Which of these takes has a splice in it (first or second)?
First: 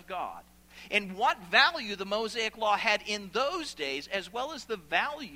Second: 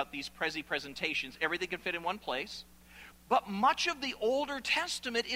second